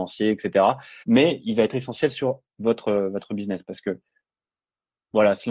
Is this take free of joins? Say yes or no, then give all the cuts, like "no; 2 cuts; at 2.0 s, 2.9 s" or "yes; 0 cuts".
no; 1 cut; at 1.0 s